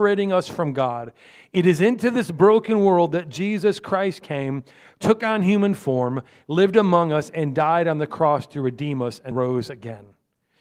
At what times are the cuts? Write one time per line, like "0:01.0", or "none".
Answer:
0:09.3